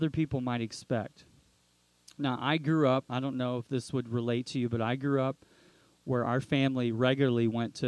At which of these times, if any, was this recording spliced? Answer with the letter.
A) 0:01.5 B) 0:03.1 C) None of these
B